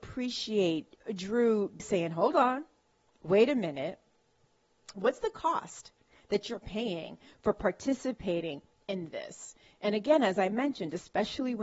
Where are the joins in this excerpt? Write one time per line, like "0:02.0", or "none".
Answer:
0:01.8